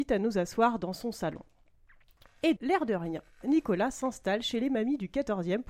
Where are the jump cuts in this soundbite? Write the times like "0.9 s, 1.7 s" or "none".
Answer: 2.6 s